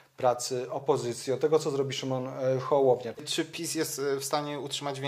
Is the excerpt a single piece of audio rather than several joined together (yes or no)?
no